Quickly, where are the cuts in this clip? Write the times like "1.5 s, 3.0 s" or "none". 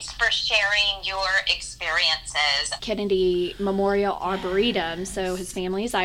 2.8 s